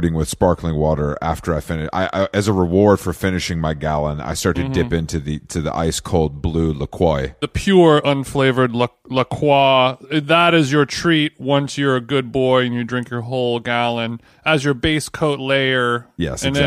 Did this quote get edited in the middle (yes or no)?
no